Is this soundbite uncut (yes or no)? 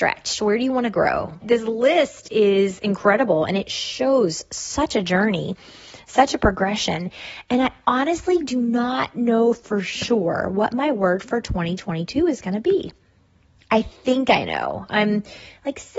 no